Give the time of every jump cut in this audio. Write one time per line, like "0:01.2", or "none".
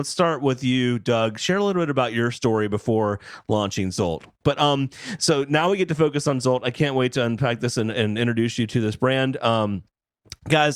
0:04.4